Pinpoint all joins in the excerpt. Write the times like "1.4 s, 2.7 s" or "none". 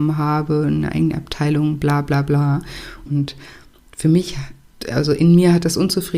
3.1 s

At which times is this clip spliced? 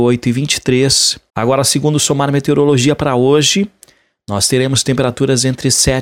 1.3 s

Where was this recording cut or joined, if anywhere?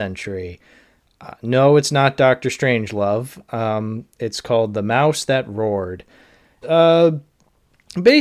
6.6 s

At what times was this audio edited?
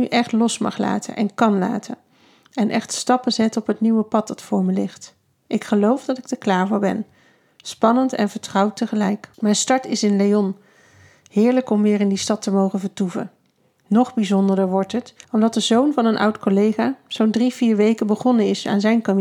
9.3 s, 15.2 s

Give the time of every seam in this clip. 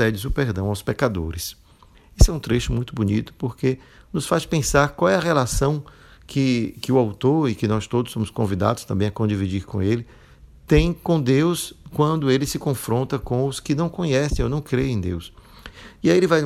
none

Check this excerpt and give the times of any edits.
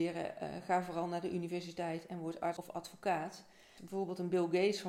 3.8 s

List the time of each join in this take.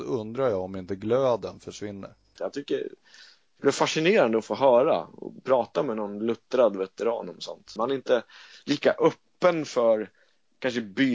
2.4 s, 7.8 s

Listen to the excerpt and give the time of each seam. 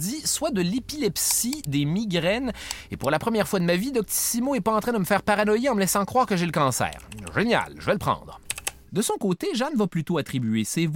none

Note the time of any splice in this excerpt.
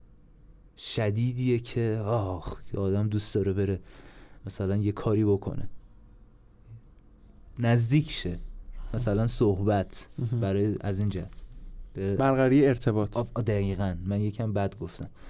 none

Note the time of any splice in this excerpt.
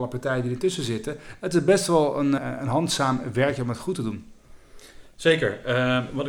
2.4 s

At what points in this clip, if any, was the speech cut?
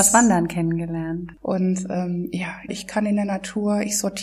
1.3 s, 2.7 s

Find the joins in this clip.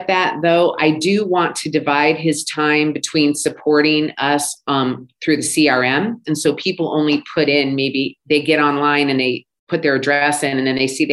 6.2 s

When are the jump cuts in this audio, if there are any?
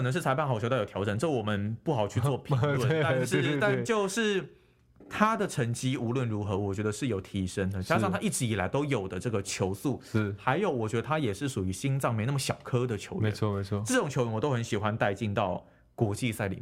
none

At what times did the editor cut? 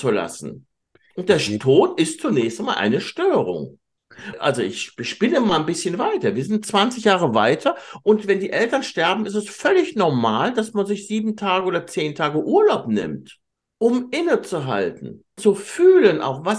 15.4 s

